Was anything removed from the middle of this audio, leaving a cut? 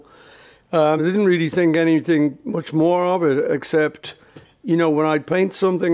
no; 0 cuts

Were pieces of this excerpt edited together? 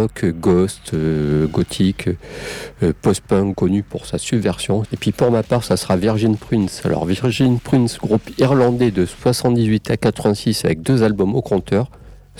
yes; 2 cuts; at 3.5 s, 4.9 s

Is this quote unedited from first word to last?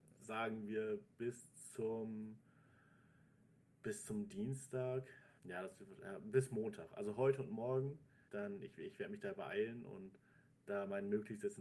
no; 2 cuts; at 5.4 s, 8.3 s

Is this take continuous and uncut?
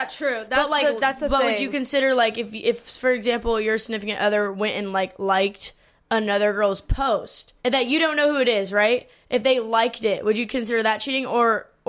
no; 1 cut; at 7.6 s

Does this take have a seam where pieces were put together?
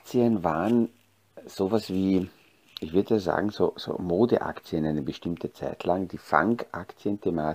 no; 0 cuts

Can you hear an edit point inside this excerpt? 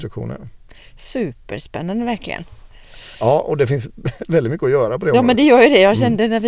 no; 0 cuts

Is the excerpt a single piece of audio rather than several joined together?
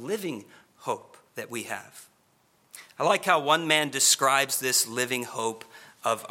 no; 1 cut; at 1.3 s

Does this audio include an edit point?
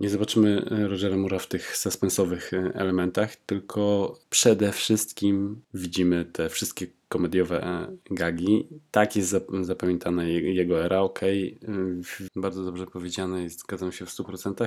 yes; 1 cut; at 12.3 s

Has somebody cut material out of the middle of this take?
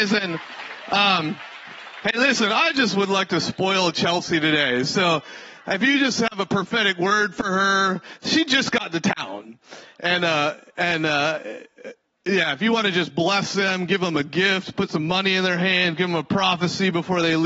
no; 0 cuts

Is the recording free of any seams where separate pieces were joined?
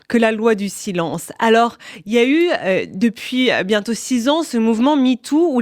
yes; 0 cuts

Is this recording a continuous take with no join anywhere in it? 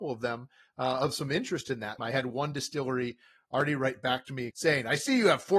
no; 2 cuts; at 2.0 s, 4.5 s

